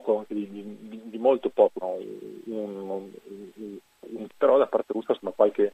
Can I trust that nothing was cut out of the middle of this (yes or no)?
no